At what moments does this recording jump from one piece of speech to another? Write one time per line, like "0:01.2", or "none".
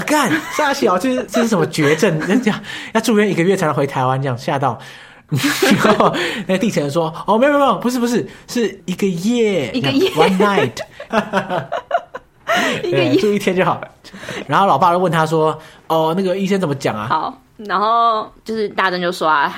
0:14.4
0:17.1

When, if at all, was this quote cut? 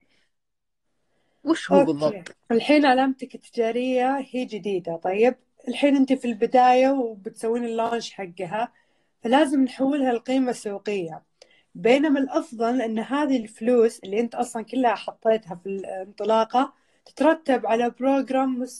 0:02.3
0:11.6

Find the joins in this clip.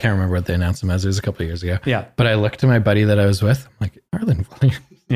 0:04.1

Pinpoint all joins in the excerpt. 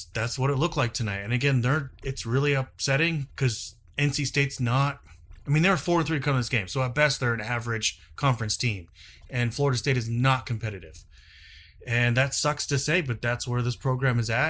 none

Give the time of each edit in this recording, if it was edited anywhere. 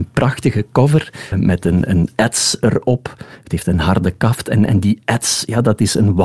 0:01.3

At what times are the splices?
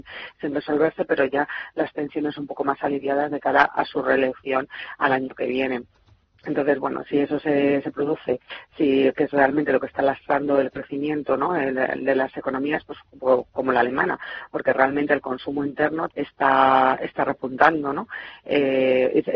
0:16.1

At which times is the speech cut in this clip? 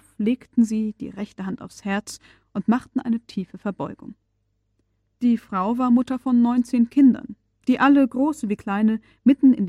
none

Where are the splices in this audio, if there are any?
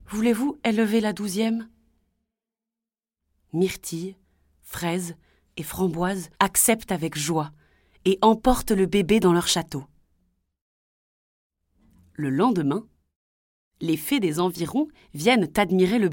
0:06.3

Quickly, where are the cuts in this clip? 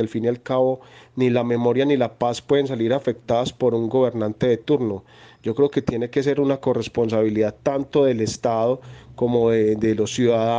none

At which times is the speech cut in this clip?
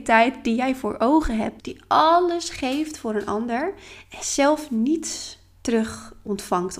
0:01.6

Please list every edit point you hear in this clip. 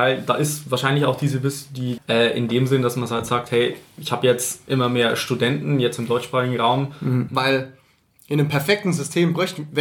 0:02.0
0:07.3

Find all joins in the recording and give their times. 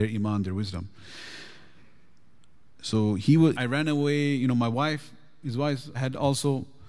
0:03.5
0:05.9

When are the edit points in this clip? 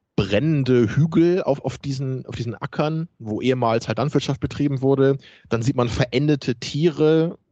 none

